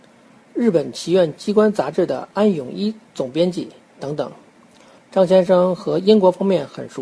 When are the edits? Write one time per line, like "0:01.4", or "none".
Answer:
0:05.0